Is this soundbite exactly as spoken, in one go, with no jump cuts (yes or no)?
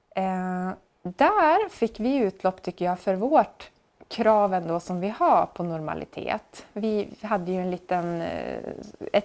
yes